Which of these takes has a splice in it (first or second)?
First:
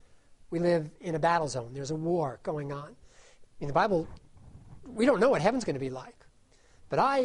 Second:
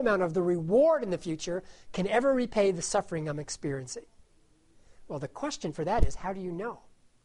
first